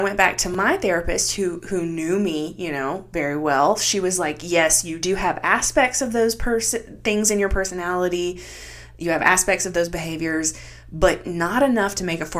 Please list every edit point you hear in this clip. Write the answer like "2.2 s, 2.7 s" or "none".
none